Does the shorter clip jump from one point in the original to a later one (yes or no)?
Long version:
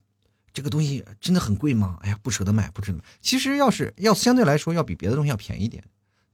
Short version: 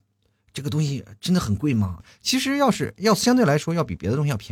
yes